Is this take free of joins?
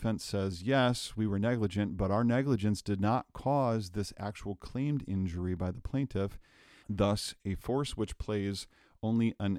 no; 1 cut; at 6.8 s

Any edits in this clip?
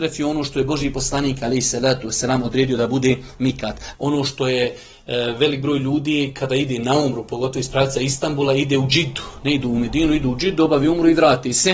yes; 1 cut; at 3.9 s

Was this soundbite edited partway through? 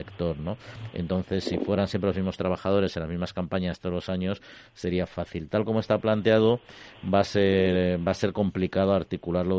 no; 0 cuts

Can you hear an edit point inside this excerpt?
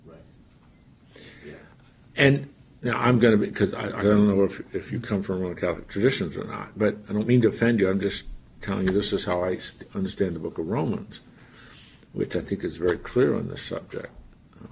yes; 1 cut; at 4.0 s

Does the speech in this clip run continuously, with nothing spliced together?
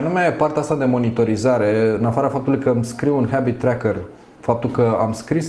yes; 0 cuts

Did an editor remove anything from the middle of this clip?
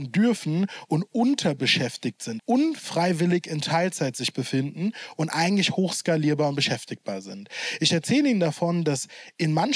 yes; 1 cut; at 2.4 s

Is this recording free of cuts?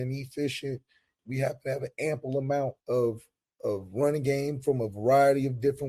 no; 2 cuts; at 1.2 s, 2.8 s

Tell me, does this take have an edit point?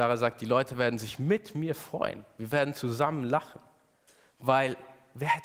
no; 0 cuts

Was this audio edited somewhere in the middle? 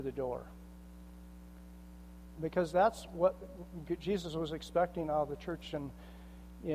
yes; 1 cut; at 2.4 s

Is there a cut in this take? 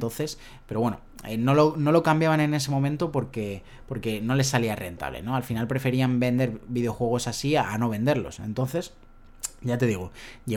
no; 0 cuts

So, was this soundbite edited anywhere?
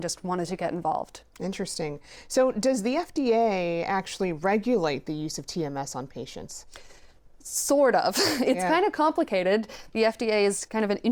no; 0 cuts

